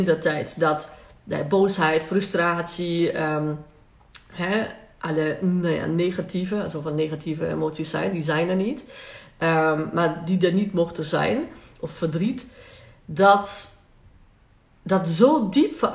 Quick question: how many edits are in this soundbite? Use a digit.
0